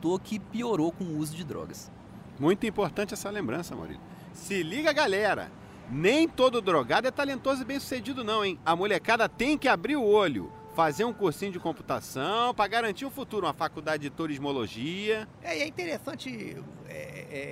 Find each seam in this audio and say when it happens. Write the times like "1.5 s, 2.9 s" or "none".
none